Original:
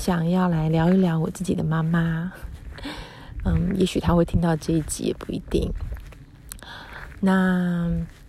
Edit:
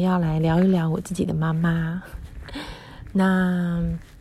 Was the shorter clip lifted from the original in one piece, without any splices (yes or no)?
no